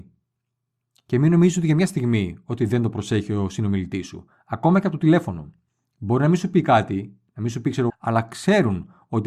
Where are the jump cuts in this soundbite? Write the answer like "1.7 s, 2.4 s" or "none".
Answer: 7.9 s